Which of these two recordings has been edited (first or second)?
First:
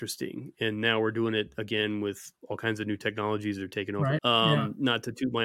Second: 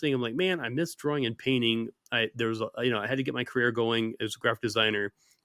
first